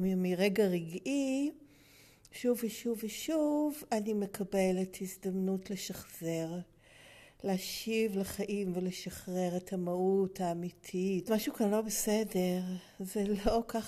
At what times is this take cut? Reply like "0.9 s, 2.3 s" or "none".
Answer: 11.3 s